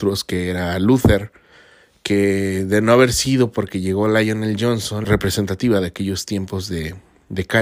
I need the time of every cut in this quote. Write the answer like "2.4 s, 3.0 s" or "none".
5.0 s